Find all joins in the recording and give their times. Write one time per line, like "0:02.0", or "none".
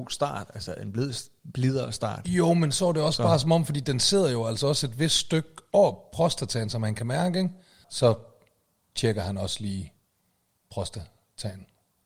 0:07.8